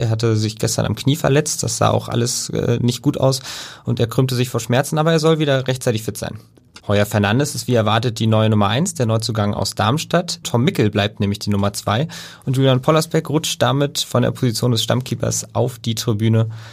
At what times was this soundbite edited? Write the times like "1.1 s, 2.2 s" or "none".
6.8 s, 10.4 s